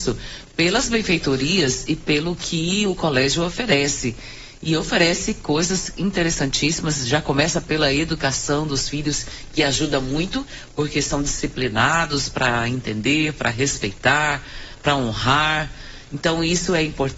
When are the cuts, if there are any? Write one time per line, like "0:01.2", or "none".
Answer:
none